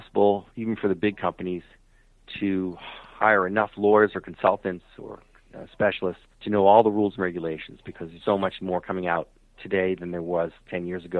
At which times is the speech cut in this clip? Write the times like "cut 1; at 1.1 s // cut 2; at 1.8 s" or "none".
cut 1; at 6.3 s // cut 2; at 8.2 s